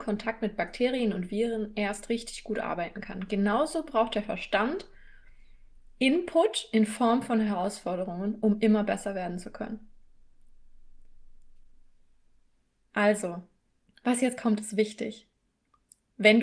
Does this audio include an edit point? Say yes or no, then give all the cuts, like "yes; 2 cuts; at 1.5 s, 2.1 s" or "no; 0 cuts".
no; 0 cuts